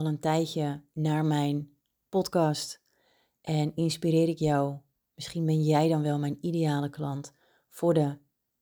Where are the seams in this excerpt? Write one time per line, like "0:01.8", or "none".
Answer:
none